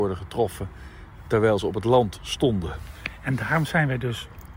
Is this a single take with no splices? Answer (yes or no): yes